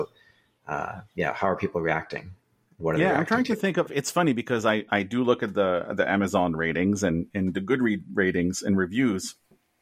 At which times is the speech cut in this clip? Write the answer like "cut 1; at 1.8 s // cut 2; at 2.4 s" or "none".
cut 1; at 3.9 s